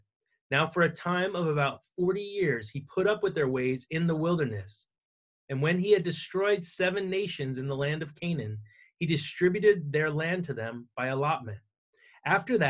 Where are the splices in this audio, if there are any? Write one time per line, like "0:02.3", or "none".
none